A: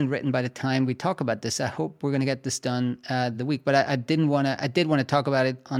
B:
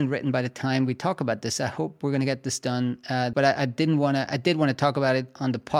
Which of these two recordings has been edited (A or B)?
B